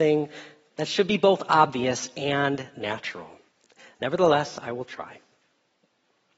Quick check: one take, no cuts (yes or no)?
yes